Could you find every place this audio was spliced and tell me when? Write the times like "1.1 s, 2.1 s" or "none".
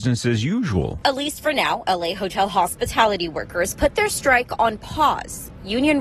none

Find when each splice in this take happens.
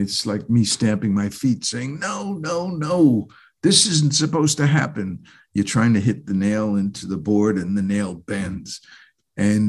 none

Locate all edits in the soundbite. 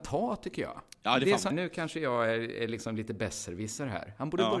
1.5 s

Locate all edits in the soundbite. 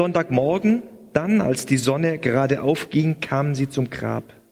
none

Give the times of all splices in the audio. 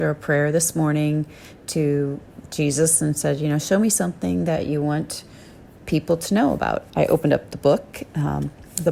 6.9 s

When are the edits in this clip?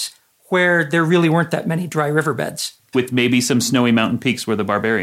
2.9 s

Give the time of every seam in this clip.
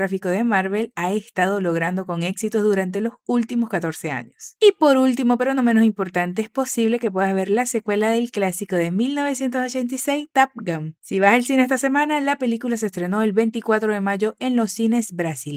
none

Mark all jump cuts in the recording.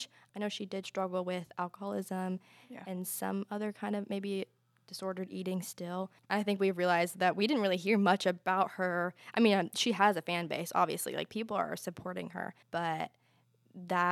6.3 s, 12.6 s

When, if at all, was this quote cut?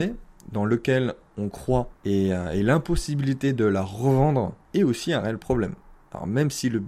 2.0 s, 4.6 s

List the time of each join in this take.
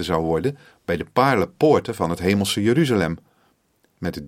none

